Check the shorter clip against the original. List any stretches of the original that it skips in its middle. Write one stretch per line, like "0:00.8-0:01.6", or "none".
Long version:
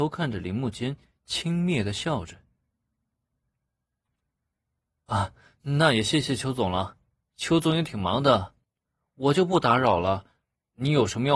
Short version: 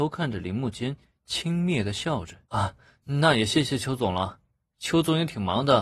0:02.4-0:05.0